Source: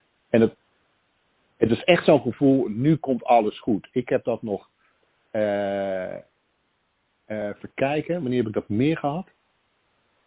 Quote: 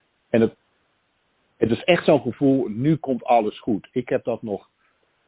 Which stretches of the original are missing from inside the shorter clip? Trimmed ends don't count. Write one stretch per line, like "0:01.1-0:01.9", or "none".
none